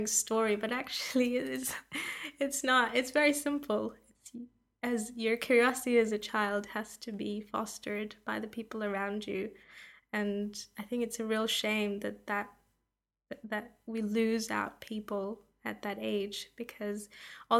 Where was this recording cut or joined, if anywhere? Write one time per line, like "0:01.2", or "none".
none